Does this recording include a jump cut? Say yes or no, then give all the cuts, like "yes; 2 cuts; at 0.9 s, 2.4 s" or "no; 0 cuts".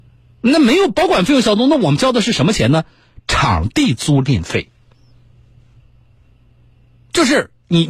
no; 0 cuts